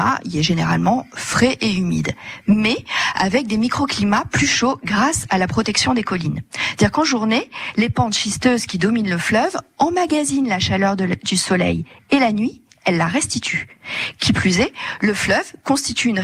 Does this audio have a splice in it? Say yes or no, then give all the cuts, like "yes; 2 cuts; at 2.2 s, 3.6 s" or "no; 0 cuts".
no; 0 cuts